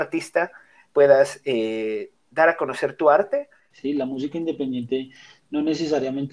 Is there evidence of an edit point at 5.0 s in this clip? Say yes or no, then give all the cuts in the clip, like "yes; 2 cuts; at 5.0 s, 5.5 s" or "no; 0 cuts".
no; 1 cut; at 3.7 s